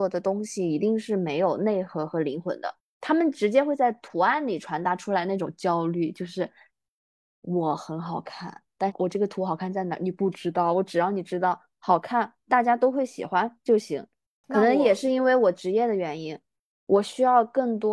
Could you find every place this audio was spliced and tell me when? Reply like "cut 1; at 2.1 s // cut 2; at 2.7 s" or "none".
cut 1; at 14.4 s